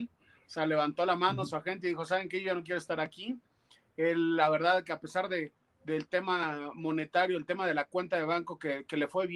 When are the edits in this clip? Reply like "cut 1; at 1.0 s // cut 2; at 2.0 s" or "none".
none